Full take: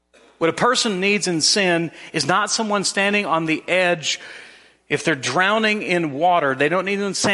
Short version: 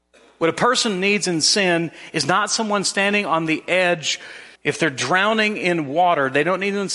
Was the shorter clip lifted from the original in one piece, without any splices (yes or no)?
no